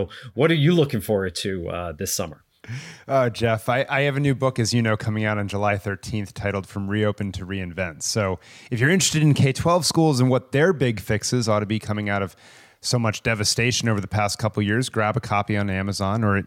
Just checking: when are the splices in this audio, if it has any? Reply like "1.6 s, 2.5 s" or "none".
none